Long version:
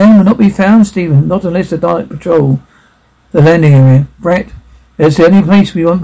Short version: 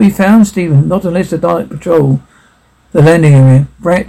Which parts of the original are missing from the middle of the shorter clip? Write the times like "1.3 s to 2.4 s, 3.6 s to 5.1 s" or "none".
none